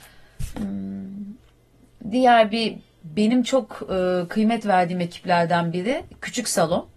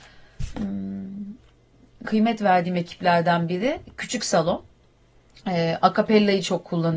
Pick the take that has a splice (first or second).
second